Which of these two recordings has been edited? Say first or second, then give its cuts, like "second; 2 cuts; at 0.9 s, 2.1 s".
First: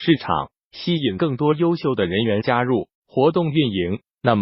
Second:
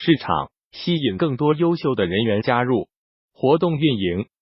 first; 1 cut; at 3.0 s